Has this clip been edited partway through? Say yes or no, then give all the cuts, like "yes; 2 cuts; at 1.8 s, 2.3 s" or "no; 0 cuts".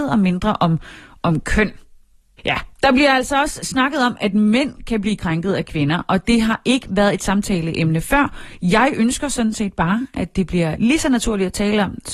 yes; 1 cut; at 2.4 s